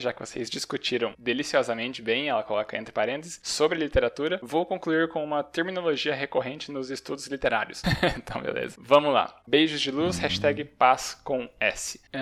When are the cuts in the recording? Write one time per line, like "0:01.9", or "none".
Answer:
0:07.8
0:09.4